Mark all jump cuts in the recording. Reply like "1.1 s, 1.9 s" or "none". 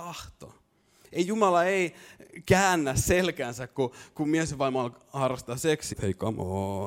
4.1 s, 5.9 s